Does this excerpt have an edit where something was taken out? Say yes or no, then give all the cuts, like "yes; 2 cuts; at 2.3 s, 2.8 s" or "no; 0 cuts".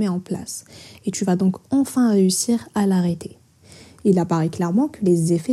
no; 0 cuts